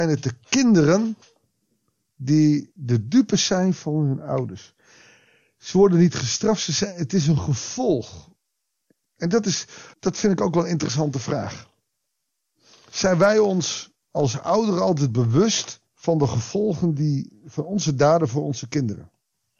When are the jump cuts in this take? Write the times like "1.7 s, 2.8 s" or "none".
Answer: 9.9 s, 15.9 s